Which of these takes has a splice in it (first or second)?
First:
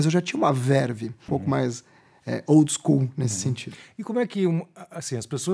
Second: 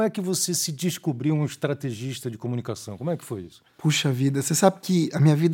first